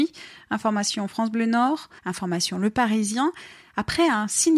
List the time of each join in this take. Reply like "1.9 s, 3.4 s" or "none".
2.0 s